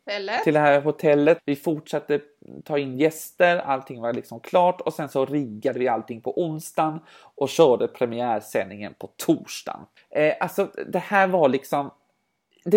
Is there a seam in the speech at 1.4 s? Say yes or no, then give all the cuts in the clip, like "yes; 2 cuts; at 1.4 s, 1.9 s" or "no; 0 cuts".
yes; 2 cuts; at 1.4 s, 10.0 s